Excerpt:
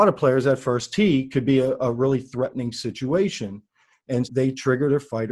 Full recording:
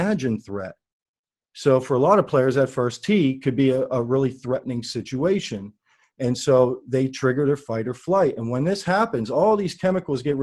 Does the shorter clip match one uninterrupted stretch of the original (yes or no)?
no